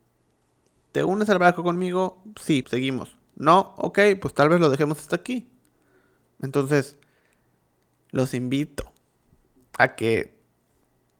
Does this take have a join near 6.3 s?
yes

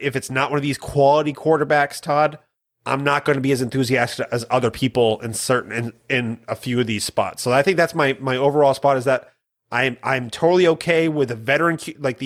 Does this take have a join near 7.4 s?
no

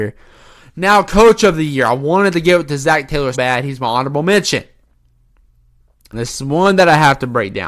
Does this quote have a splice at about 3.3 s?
yes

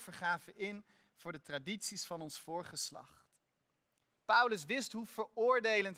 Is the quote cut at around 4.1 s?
yes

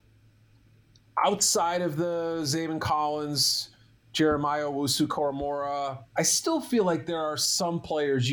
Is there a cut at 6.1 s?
yes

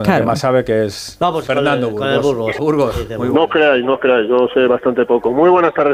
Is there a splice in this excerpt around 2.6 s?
yes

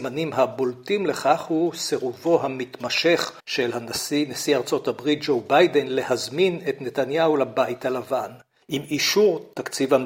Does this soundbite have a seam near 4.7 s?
no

